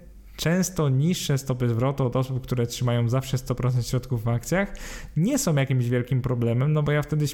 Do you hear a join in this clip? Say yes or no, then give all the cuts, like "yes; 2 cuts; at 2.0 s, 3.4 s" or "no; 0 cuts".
no; 0 cuts